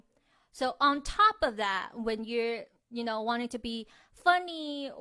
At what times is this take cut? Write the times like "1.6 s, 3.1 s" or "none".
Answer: none